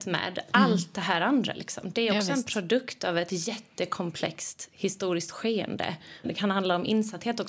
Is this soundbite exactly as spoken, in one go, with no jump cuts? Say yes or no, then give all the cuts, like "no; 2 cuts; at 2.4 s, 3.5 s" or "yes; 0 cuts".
no; 1 cut; at 6.2 s